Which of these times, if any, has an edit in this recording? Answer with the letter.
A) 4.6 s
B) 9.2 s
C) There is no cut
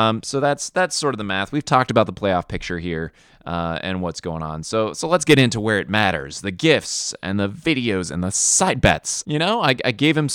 B